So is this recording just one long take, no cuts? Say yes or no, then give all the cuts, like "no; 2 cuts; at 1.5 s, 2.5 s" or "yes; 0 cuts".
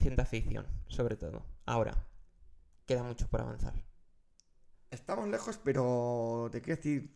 no; 1 cut; at 4.7 s